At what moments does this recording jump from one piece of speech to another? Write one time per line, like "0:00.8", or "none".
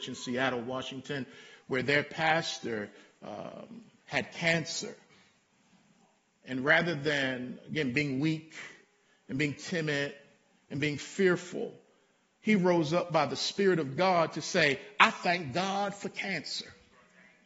none